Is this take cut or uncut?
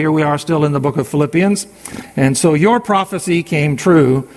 uncut